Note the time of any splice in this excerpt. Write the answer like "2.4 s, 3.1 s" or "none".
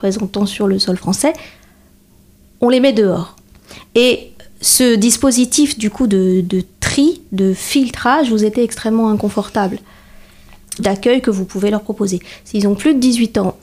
10.8 s